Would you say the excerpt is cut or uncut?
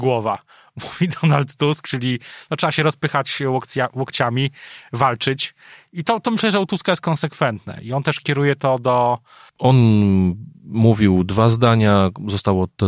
cut